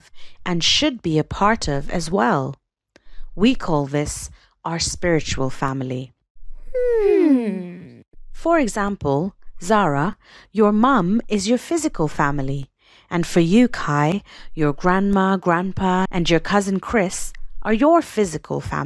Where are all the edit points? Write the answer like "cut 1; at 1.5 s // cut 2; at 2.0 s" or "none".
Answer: cut 1; at 16.1 s

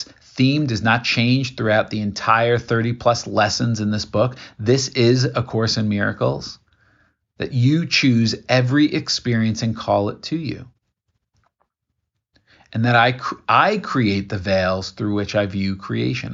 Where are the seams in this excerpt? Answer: none

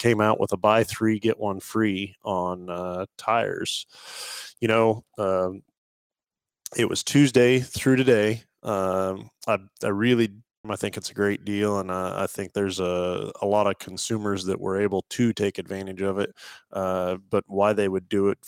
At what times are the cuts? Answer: cut 1; at 10.6 s

